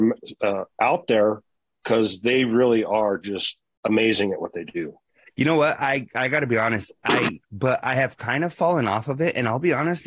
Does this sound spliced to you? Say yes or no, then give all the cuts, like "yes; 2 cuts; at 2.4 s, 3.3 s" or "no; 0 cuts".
yes; 1 cut; at 7.4 s